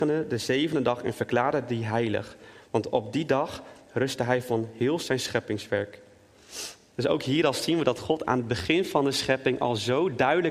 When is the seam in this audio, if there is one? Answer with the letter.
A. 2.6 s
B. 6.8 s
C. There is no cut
C